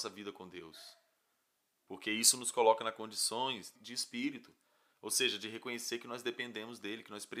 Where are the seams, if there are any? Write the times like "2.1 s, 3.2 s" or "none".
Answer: 3.7 s